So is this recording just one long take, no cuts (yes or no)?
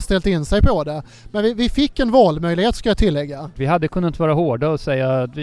no